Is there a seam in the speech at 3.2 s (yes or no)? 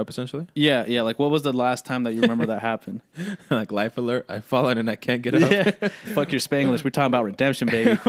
no